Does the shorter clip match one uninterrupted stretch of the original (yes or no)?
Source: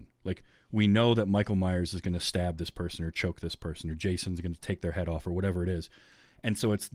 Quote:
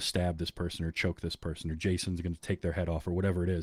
yes